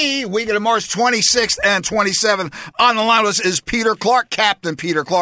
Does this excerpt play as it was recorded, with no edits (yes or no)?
yes